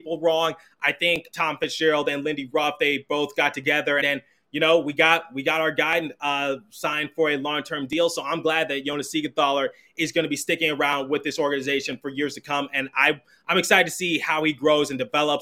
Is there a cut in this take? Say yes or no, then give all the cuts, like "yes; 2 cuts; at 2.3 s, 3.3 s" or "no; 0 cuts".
yes; 2 cuts; at 1.3 s, 4.0 s